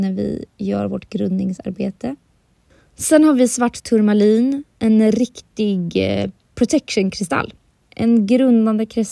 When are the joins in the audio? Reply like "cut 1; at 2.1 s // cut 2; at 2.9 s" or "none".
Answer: cut 1; at 7.8 s